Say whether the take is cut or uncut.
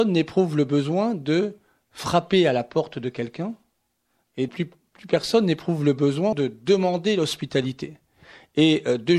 cut